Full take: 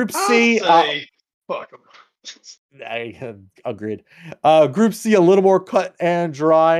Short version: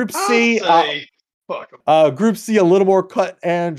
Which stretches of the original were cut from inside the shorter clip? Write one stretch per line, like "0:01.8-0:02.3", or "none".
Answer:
0:01.8-0:04.4